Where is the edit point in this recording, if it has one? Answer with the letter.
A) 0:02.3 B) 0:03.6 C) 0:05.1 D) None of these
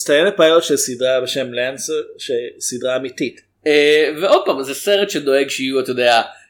B